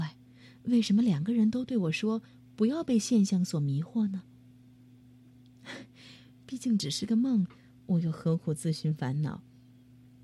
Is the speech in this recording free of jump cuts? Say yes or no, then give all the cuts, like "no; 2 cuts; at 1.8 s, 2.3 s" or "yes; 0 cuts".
yes; 0 cuts